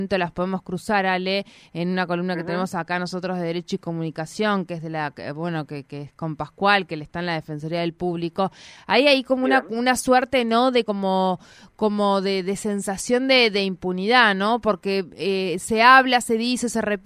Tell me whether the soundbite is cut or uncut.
uncut